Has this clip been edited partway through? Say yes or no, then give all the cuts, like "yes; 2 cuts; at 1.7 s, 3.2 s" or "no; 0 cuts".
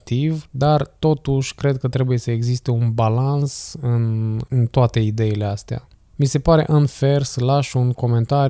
no; 0 cuts